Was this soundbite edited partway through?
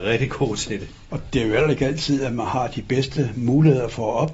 yes; 1 cut; at 1.1 s

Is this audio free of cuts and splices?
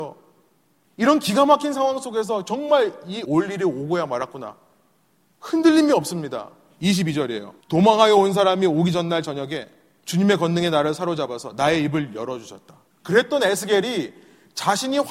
no; 2 cuts; at 7.6 s, 12.9 s

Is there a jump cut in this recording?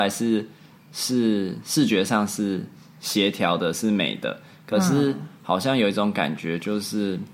no; 0 cuts

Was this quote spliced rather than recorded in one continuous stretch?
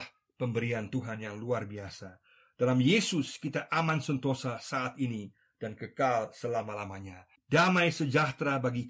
yes; 1 cut; at 7.4 s

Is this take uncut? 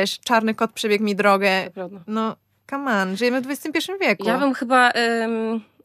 yes; 0 cuts

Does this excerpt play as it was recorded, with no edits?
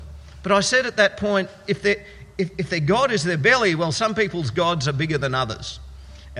yes; 0 cuts

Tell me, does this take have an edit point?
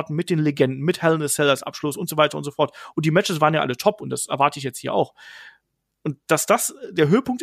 no; 0 cuts

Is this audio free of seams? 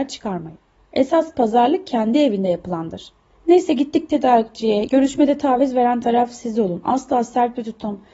no; 1 cut; at 4.9 s

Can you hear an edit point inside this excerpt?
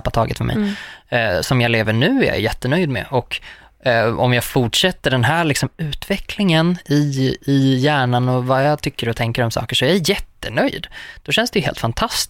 no; 0 cuts

